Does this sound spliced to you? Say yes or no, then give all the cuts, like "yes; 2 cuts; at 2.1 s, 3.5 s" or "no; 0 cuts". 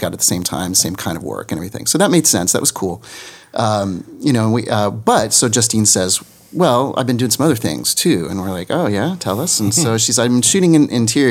no; 0 cuts